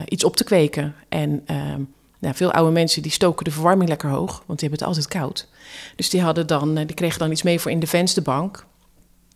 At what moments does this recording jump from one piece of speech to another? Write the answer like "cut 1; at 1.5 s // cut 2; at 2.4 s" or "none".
none